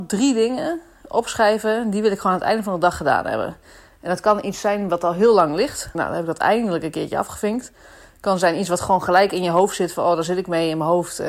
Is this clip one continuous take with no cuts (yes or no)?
no